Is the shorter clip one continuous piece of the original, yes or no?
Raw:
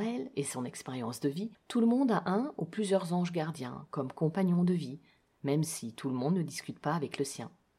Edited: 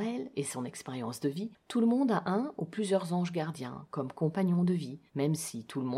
no